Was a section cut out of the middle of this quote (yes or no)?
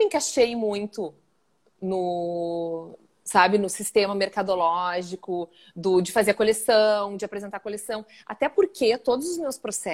no